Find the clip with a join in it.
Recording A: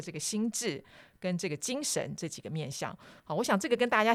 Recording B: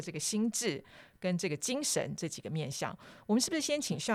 A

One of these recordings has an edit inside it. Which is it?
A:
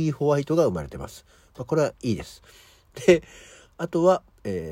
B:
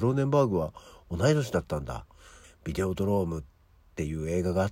B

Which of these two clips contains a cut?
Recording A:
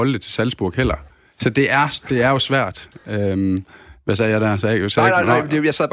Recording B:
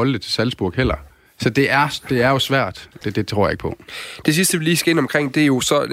B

